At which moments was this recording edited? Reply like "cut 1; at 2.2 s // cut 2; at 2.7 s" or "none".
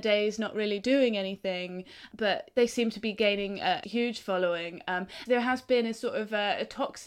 cut 1; at 3.8 s // cut 2; at 5.3 s